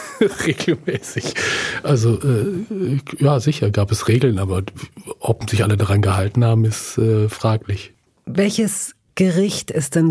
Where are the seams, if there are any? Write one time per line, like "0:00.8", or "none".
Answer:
none